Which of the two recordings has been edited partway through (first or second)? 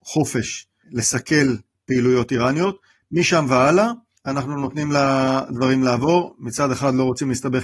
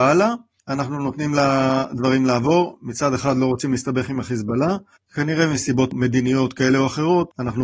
second